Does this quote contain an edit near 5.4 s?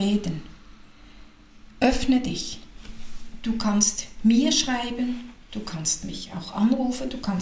no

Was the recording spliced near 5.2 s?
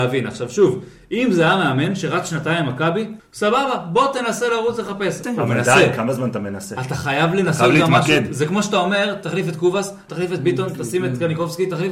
yes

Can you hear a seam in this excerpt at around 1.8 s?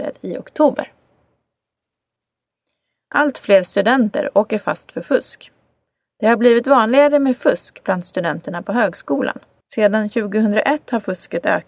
no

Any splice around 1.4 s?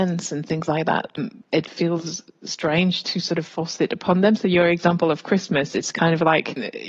yes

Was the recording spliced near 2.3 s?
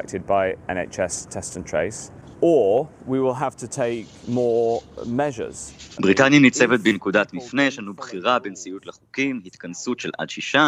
no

